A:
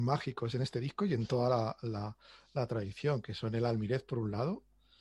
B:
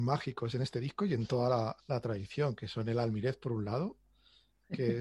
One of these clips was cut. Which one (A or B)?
B